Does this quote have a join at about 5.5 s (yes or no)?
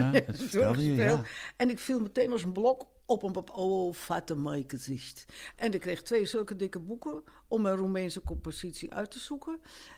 yes